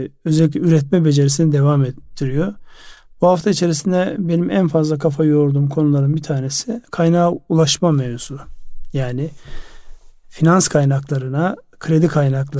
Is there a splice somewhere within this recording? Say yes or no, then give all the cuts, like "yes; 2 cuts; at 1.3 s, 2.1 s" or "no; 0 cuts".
no; 0 cuts